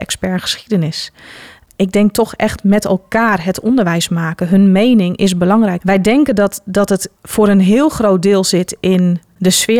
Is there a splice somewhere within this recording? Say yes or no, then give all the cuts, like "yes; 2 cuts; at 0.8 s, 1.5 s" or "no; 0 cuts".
yes; 2 cuts; at 5.8 s, 7.2 s